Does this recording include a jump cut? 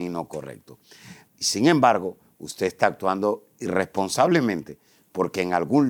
yes; 1 cut; at 1.3 s

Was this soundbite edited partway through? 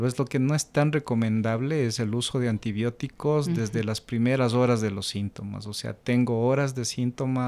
no; 0 cuts

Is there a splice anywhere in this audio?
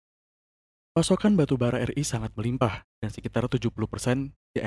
yes; 1 cut; at 2.9 s

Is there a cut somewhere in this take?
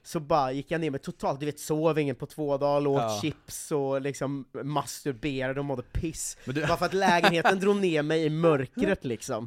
no; 0 cuts

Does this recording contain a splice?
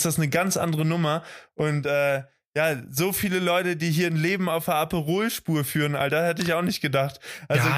no; 0 cuts

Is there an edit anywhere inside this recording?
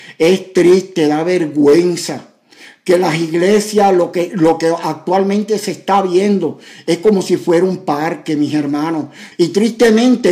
yes; 1 cut; at 9.3 s

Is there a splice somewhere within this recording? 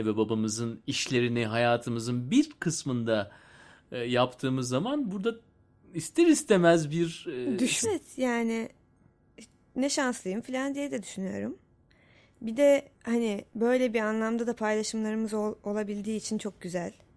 yes; 2 cuts; at 7.8 s, 13.0 s

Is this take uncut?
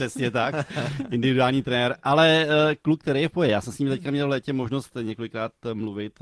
yes; 0 cuts

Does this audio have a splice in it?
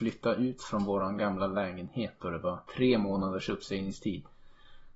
yes; 1 cut; at 2.7 s

